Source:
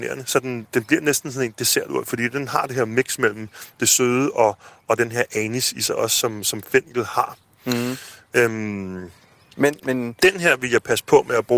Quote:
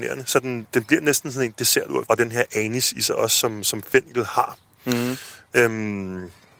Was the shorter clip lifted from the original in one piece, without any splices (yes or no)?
no